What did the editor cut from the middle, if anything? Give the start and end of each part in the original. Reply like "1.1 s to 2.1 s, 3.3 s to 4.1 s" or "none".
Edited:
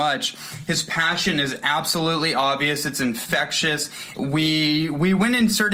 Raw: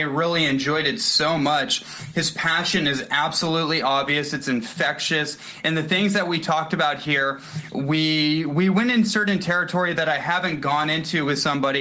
5.6 s to 7.7 s

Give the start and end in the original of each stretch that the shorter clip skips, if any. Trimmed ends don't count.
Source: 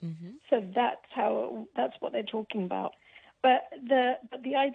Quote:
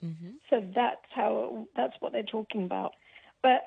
none

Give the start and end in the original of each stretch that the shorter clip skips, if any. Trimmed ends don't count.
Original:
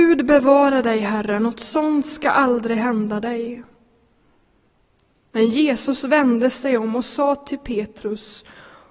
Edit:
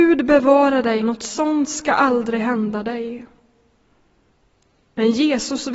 1.0 s to 1.4 s

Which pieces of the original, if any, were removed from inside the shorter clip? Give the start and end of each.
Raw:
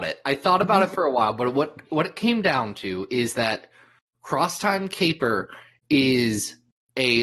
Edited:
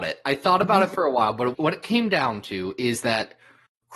1.5 s to 1.9 s

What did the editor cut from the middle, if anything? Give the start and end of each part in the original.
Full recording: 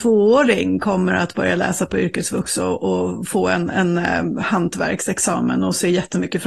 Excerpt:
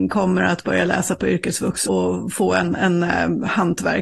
2.6 s to 2.8 s

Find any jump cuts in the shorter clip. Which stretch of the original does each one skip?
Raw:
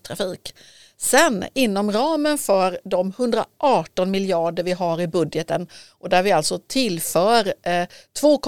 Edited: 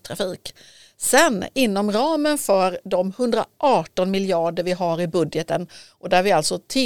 none

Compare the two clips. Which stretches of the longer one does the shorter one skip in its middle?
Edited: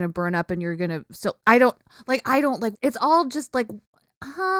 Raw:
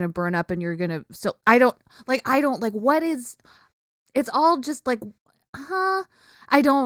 2.7 s to 4.0 s

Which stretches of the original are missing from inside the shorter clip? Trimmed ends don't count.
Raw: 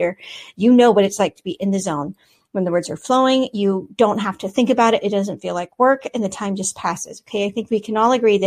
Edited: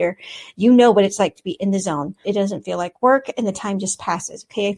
2.2 s to 5.0 s

